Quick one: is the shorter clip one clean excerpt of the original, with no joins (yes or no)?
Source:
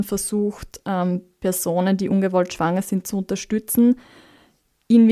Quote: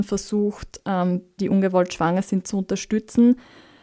no